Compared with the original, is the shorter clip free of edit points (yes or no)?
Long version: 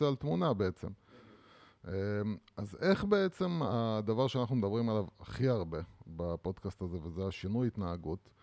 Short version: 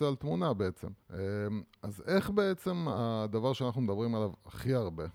no